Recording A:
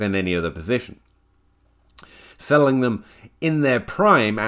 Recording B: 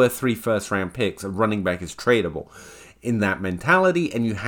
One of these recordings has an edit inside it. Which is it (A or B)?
A